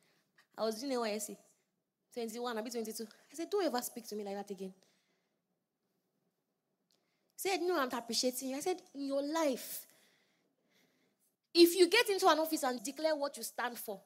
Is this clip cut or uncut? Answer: cut